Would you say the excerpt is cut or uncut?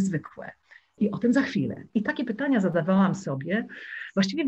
cut